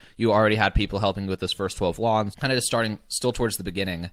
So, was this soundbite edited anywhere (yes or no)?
yes